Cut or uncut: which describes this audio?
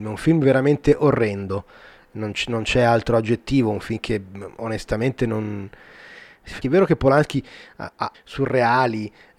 cut